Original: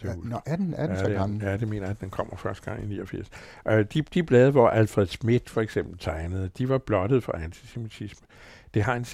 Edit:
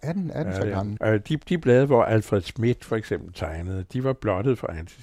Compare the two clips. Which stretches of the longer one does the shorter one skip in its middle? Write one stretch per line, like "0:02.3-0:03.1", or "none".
0:01.4-0:03.6